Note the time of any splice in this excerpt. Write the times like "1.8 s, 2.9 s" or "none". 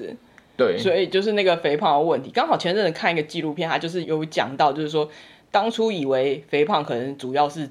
4.0 s